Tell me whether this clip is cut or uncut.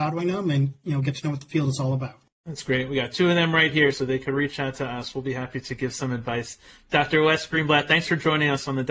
uncut